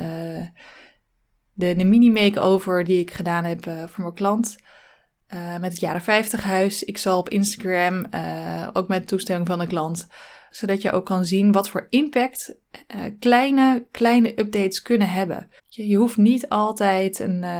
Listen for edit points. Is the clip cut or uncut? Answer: cut